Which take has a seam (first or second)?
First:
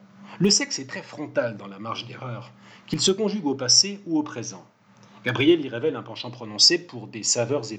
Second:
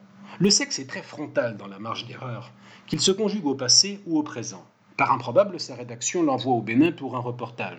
second